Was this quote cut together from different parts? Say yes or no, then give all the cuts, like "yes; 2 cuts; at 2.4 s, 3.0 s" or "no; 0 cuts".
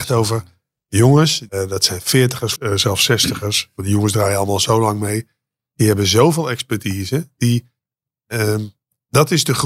yes; 2 cuts; at 1.5 s, 2.6 s